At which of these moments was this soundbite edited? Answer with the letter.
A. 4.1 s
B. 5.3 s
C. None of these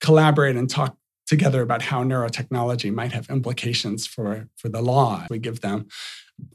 B